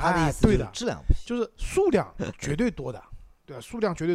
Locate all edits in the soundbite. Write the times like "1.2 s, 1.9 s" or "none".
none